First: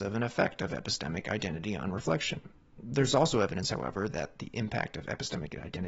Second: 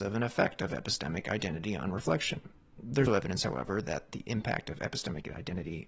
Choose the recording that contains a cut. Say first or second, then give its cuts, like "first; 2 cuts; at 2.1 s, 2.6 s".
second; 1 cut; at 3.1 s